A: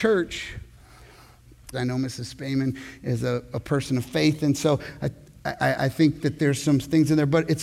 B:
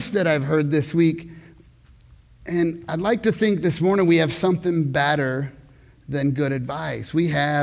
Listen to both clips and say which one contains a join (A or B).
A